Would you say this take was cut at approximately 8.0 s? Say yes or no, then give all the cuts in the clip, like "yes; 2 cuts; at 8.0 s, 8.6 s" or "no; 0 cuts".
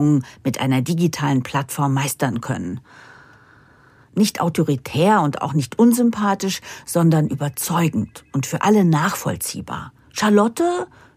no; 2 cuts; at 4.1 s, 10.0 s